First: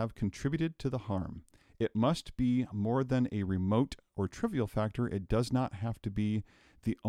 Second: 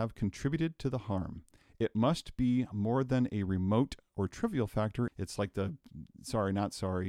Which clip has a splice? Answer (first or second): second